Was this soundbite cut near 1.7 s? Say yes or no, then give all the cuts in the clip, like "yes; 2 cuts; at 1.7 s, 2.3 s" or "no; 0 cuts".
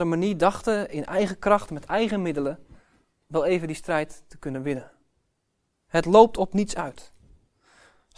no; 1 cut; at 5.7 s